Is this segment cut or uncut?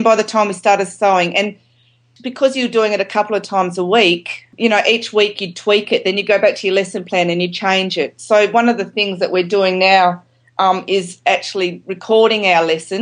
uncut